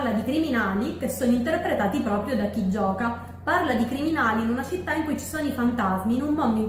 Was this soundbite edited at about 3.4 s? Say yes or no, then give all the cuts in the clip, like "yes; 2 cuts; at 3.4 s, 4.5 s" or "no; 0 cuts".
no; 0 cuts